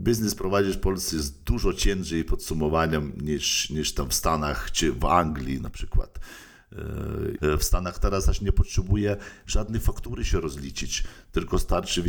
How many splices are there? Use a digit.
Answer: 1